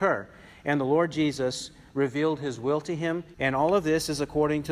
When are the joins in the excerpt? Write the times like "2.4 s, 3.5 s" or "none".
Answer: 3.3 s